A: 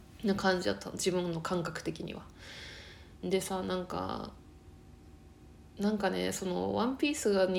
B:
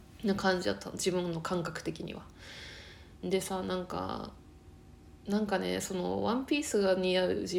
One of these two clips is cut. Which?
B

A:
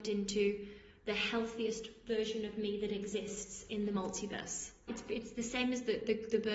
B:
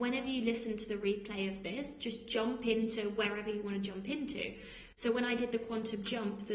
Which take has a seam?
A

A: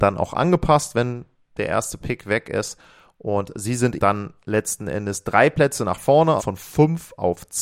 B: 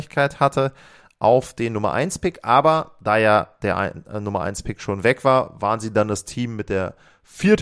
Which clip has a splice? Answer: A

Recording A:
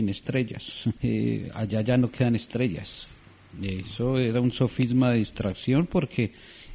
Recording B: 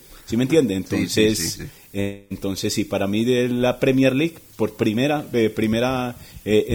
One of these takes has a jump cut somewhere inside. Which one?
A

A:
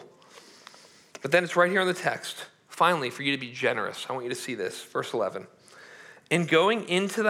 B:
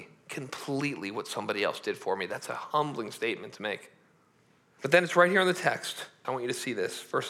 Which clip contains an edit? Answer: B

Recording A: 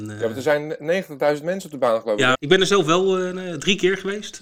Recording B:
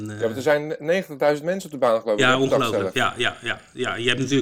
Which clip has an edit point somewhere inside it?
A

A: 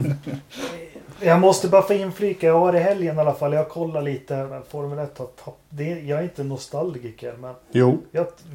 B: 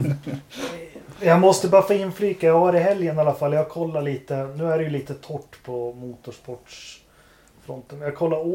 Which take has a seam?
A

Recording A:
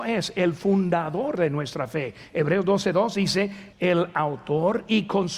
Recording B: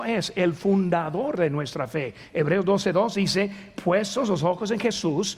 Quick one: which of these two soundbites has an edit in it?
A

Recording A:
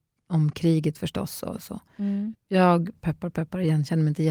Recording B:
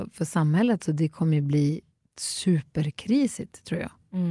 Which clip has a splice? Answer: A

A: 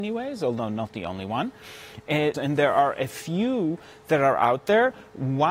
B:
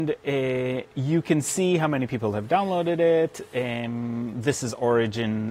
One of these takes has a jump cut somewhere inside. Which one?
A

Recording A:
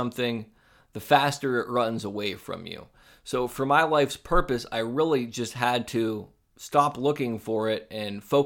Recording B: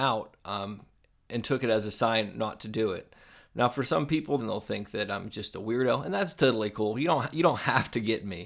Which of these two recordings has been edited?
B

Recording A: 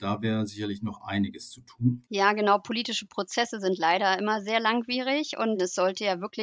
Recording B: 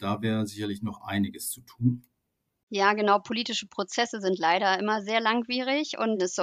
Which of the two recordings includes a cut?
A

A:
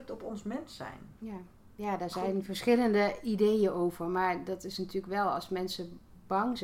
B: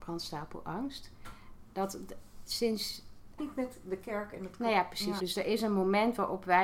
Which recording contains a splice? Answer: B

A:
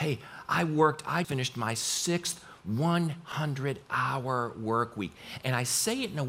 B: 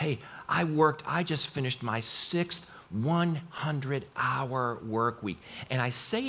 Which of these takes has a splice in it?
A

